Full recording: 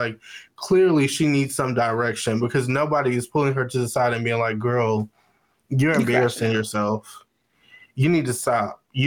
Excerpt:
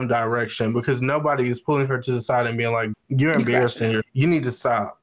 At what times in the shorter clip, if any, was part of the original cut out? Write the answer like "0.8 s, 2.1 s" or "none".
2.9 s, 4.0 s